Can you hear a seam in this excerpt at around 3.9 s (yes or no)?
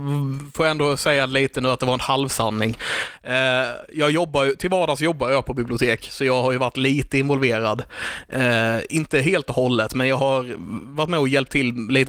no